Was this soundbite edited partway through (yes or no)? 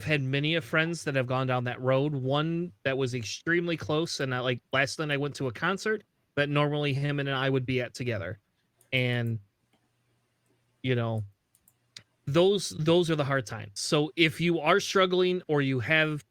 no